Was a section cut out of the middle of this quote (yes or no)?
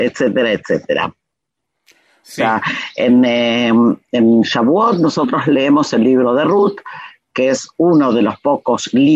yes